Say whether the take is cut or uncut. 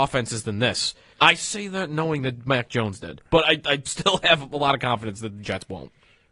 cut